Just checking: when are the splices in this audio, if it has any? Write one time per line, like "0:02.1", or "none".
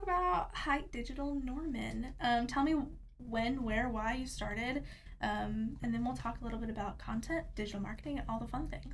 0:05.8

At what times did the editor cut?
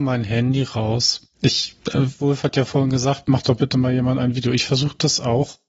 none

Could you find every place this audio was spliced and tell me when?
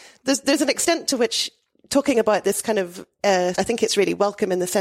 0:03.5

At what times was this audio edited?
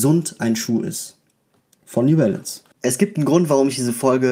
0:02.7

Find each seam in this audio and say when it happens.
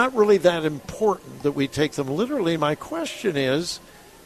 none

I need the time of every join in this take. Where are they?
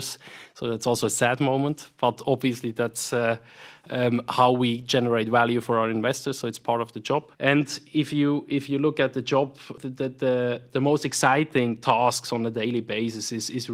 0:07.3
0:09.8

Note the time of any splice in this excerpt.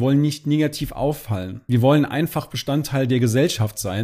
none

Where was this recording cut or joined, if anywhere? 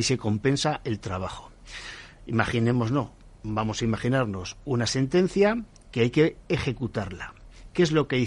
none

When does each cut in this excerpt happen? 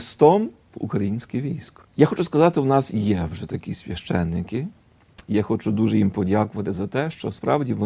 none

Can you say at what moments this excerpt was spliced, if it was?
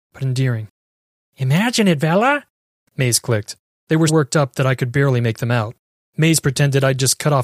0:04.1
0:06.0

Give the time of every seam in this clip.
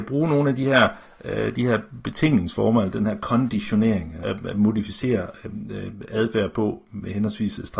0:04.2

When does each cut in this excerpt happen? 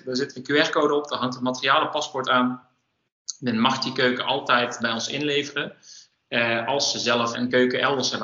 0:04.8
0:07.3

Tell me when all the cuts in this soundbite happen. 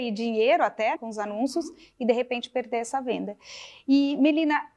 0:01.0

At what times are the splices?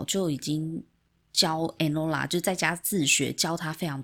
none

